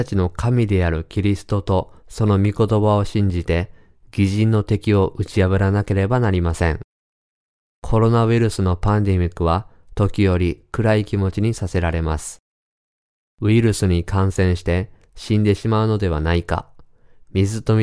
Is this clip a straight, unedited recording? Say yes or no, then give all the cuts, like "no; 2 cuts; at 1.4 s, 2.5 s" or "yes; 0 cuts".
yes; 0 cuts